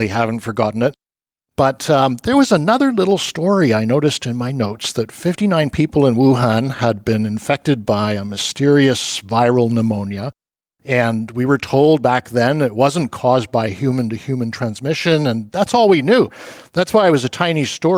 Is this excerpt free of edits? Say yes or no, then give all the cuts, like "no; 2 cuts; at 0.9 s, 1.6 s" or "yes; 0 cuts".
yes; 0 cuts